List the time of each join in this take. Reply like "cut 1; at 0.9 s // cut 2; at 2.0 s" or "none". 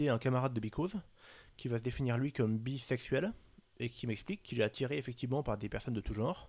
none